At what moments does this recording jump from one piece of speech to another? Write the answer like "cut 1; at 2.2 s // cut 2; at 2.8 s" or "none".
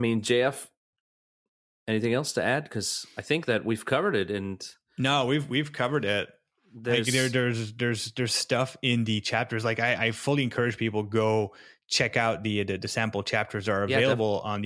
none